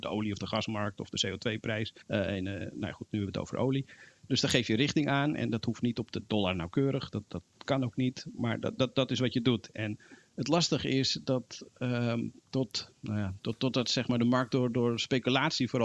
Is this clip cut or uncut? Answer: cut